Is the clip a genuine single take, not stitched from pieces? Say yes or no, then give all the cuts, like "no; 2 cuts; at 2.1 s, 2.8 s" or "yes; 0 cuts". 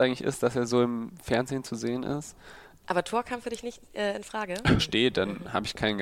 no; 2 cuts; at 2.8 s, 4.8 s